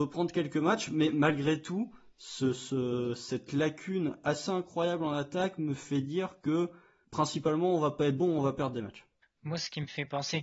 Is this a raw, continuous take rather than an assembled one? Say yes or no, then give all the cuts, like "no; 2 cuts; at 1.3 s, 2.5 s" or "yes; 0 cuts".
yes; 0 cuts